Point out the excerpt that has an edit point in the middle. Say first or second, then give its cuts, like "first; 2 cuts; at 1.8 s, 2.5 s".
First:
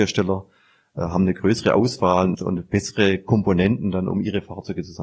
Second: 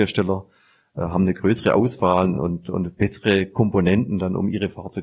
first; 1 cut; at 2.3 s